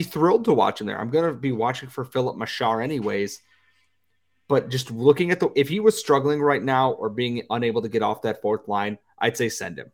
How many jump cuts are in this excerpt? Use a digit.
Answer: 0